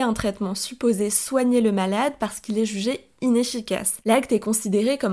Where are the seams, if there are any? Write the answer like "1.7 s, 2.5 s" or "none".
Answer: none